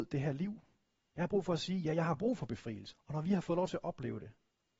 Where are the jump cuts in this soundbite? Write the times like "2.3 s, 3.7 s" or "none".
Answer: 2.9 s